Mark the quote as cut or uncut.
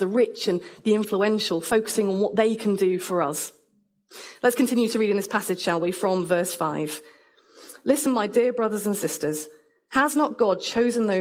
uncut